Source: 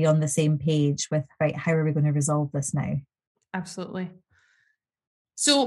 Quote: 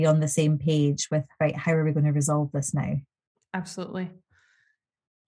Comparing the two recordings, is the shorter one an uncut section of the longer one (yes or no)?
yes